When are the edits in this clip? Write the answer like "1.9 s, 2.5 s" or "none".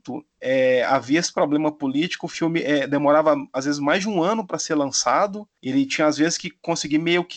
none